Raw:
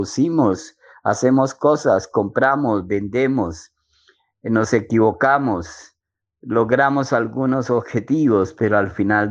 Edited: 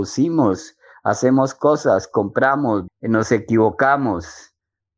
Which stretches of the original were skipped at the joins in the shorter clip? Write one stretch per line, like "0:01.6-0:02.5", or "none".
0:02.9-0:04.3